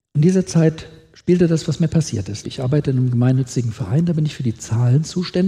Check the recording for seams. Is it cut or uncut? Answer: cut